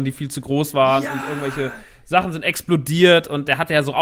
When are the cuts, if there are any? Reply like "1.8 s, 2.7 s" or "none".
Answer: none